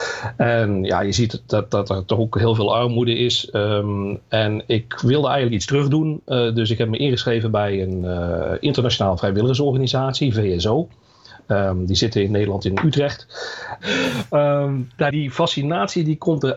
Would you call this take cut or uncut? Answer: cut